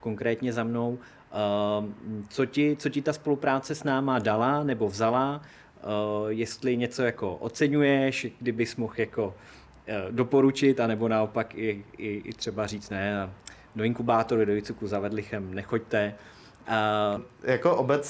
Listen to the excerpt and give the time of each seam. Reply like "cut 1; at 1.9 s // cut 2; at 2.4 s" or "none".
cut 1; at 17.2 s